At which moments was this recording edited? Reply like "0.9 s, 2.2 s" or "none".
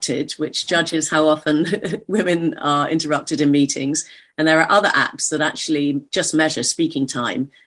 none

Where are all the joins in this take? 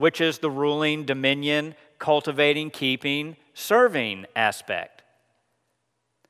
none

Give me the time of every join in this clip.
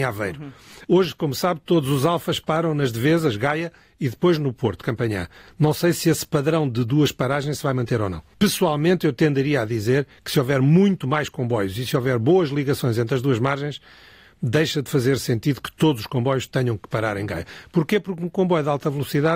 none

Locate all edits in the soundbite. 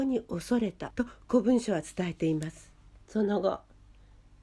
3.0 s

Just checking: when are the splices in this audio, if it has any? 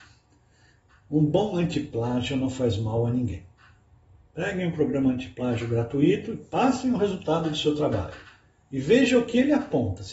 none

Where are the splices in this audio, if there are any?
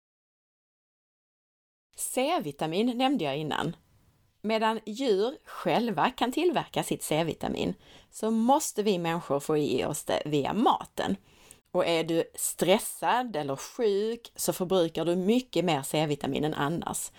11.6 s

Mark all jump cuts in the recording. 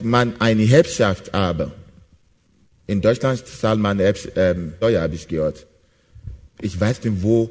4.8 s, 6.5 s

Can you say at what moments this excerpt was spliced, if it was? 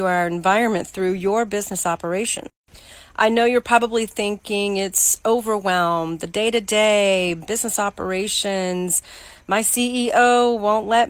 none

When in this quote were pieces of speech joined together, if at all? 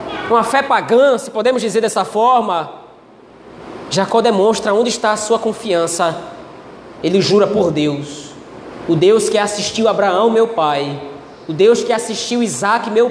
7.0 s

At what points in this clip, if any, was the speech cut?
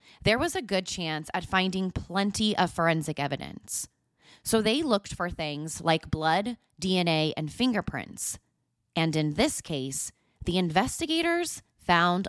none

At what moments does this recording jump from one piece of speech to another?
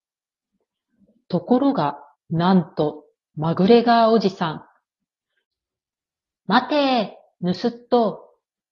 2.1 s, 6.4 s

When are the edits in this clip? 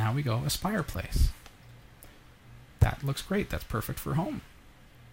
none

